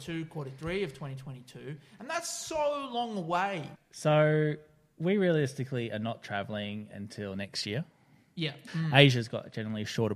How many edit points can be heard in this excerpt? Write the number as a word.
two